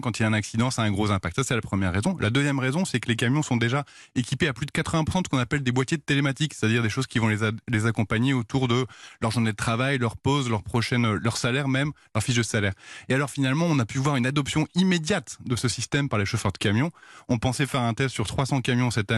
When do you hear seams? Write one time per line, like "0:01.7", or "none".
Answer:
none